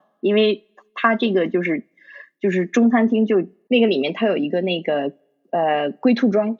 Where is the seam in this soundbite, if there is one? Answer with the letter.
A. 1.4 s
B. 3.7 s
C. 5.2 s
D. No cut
B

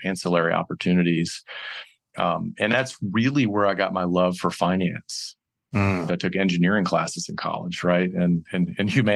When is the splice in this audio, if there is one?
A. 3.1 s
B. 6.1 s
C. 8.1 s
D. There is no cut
B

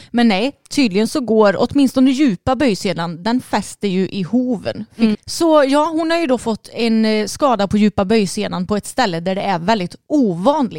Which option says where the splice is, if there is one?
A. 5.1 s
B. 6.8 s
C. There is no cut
A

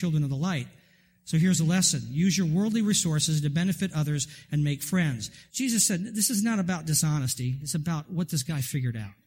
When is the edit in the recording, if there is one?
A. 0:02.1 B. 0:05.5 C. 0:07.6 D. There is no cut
B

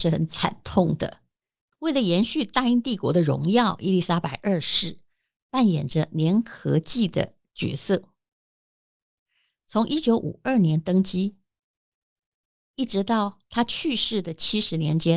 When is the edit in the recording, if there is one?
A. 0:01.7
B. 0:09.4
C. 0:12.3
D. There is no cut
A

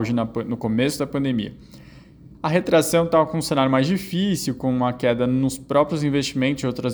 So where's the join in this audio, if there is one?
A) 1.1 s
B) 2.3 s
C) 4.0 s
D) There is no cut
B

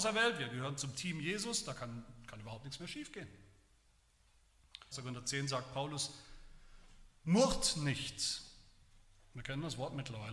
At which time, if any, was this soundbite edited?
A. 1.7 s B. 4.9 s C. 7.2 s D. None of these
B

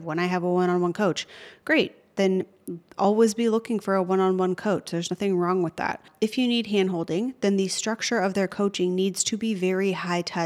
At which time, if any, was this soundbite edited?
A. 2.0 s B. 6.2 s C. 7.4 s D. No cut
D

